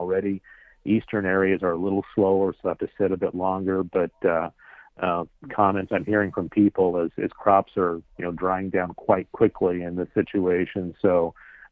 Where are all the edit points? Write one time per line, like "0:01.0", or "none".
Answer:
none